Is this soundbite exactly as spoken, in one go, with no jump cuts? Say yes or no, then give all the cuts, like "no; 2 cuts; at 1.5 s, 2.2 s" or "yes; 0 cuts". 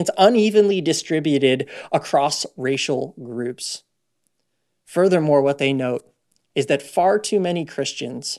yes; 0 cuts